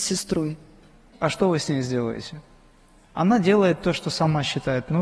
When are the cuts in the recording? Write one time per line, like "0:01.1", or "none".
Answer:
0:01.1